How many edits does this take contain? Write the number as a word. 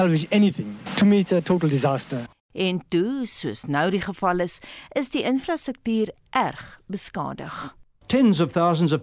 zero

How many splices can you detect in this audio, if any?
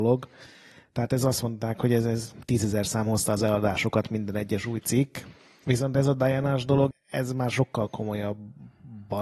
one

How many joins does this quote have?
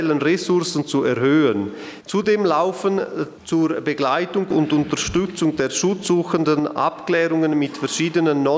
one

